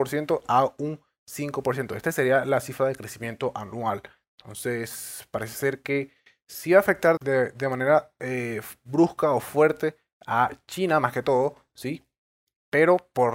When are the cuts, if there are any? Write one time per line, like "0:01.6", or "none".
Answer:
0:07.2